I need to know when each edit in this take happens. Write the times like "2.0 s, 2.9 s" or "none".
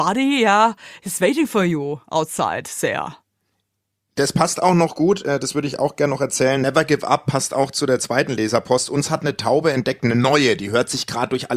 none